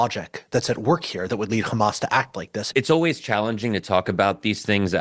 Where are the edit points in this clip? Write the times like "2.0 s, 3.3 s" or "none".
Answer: 2.7 s

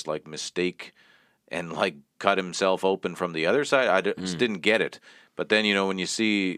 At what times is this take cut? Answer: 2.1 s

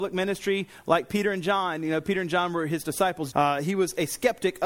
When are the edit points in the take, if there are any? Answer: 3.3 s

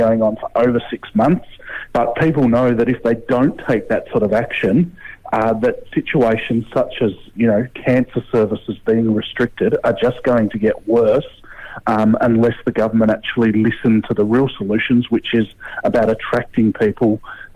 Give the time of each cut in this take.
1.9 s

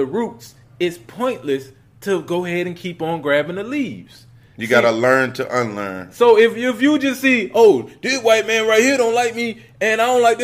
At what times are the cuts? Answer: none

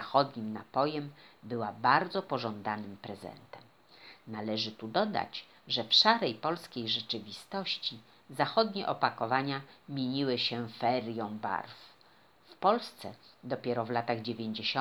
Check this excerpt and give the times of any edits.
12.4 s

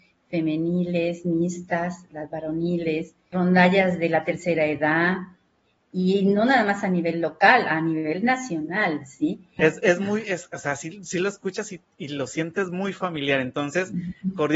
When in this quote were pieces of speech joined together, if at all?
3.3 s, 9.6 s

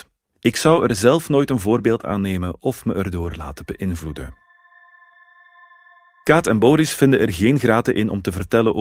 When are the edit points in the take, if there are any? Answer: none

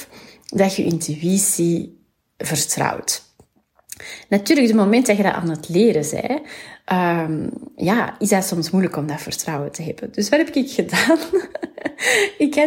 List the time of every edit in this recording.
none

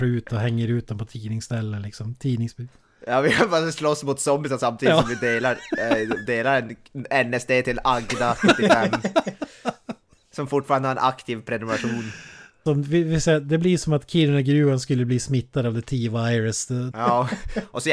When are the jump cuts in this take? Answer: 12.7 s, 16.9 s

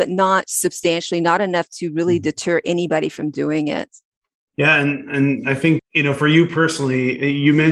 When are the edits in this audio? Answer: 5.8 s

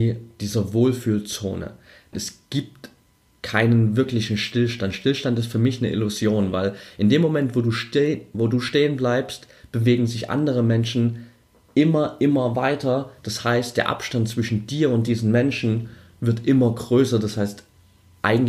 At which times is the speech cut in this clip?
2.1 s

